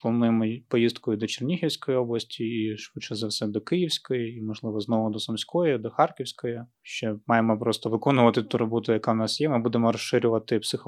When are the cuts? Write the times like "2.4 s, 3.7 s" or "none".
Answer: none